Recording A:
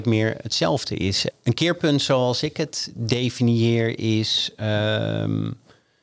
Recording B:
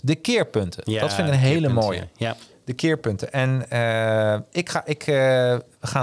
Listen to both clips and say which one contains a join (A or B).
A